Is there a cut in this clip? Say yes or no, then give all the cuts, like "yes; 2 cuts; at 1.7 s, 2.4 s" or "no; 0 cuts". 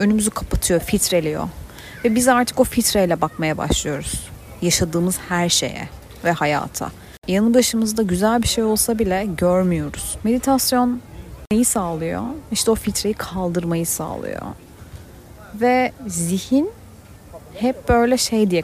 yes; 1 cut; at 10.2 s